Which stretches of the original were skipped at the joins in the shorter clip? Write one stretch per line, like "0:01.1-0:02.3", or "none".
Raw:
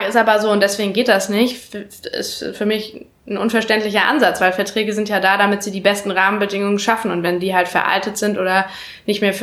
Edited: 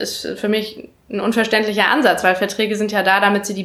none